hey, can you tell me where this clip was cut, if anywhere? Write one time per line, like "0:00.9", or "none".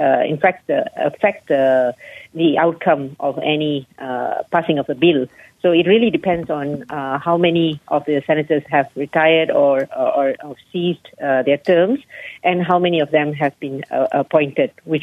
none